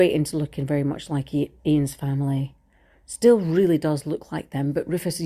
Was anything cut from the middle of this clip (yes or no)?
no